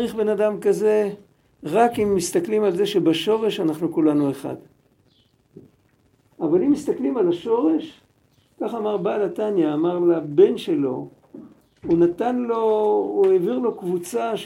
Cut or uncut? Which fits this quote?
cut